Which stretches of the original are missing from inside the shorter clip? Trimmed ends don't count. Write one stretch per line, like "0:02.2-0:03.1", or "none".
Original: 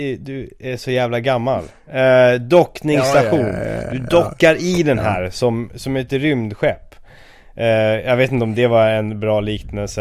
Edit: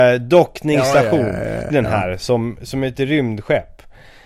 0:03.9-0:04.8